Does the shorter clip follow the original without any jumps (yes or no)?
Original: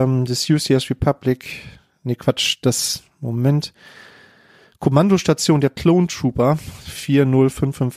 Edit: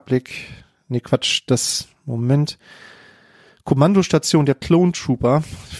yes